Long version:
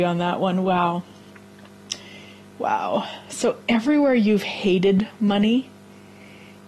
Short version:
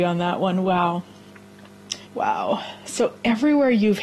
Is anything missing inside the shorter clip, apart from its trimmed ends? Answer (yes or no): yes